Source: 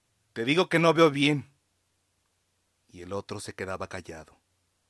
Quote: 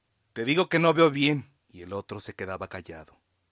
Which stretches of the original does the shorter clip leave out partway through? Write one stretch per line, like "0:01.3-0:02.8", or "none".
0:01.6-0:02.8